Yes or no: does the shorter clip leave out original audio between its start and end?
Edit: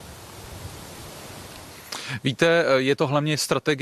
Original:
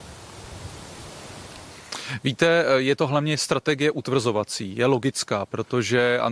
no